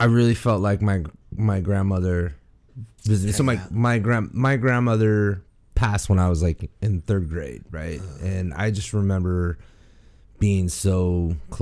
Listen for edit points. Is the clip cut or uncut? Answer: uncut